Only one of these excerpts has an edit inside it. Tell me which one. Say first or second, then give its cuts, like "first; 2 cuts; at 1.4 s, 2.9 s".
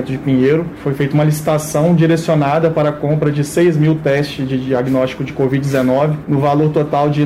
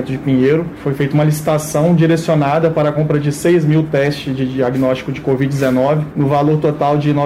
second; 1 cut; at 2.9 s